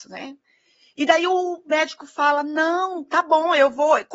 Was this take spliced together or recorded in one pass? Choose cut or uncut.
uncut